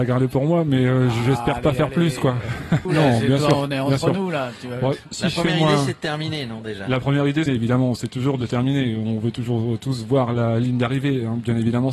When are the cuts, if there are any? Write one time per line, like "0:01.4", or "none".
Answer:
0:02.8
0:07.5